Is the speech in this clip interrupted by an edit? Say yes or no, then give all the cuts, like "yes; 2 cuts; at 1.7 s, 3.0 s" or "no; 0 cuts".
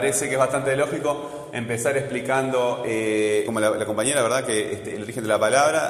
yes; 1 cut; at 3.5 s